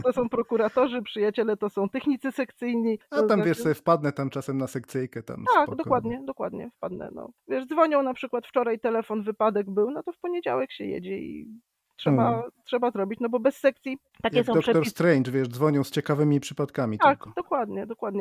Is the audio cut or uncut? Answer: uncut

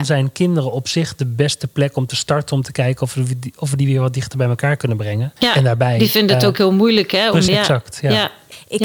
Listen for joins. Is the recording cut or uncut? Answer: cut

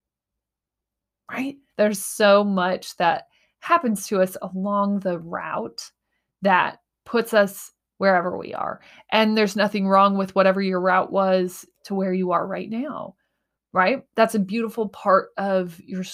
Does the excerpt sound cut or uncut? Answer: cut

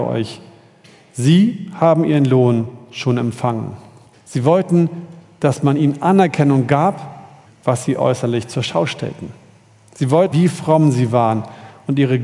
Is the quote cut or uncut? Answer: cut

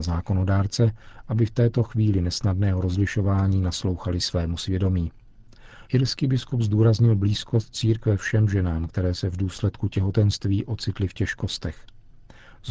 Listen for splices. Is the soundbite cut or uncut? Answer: cut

